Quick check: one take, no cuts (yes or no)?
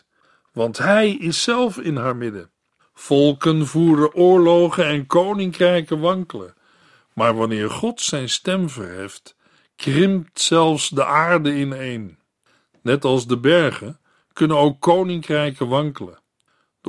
no